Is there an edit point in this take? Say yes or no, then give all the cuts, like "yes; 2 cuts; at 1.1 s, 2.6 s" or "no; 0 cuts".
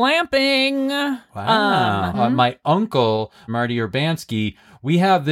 yes; 2 cuts; at 2.1 s, 3.5 s